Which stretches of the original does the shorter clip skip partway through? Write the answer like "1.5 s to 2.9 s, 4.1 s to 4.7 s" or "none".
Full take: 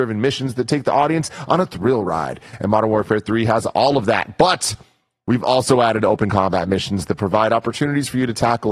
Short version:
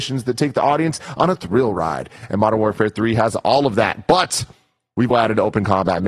5.4 s to 5.8 s